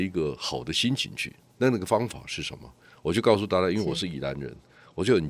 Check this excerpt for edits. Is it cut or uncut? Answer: uncut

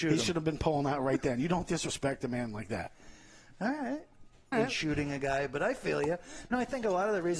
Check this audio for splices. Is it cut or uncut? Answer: cut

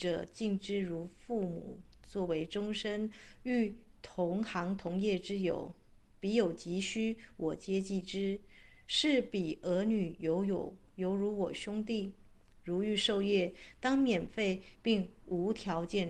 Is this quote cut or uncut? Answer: uncut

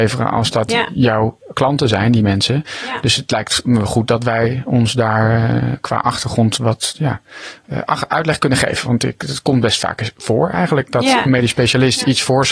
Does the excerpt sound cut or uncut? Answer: uncut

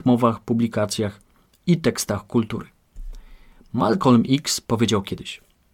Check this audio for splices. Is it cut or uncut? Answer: uncut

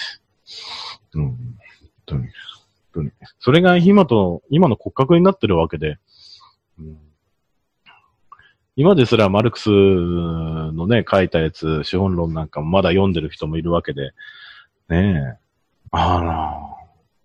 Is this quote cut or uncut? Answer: cut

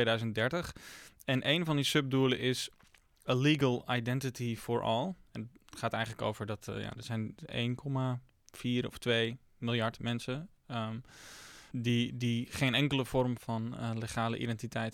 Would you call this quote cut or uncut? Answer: cut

